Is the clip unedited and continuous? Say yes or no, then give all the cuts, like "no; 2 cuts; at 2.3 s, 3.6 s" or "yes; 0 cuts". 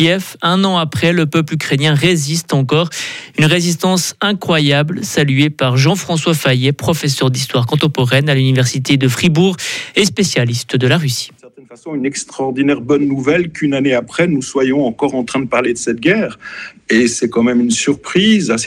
no; 2 cuts; at 11.4 s, 16.8 s